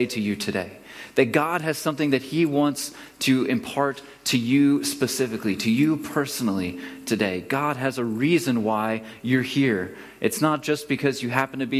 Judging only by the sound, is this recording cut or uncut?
uncut